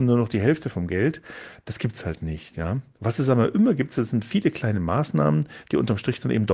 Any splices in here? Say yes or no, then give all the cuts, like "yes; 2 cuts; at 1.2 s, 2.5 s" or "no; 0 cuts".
no; 0 cuts